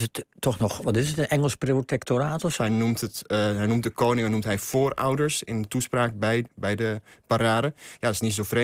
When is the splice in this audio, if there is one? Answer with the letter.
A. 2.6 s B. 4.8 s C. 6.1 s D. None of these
A